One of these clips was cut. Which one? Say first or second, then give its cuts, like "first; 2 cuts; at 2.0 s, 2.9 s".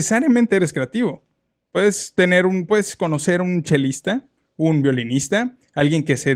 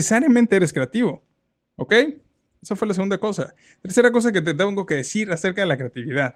second; 1 cut; at 1.6 s